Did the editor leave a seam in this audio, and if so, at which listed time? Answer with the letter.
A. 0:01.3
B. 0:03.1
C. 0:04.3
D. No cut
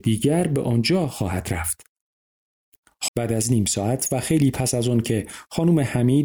B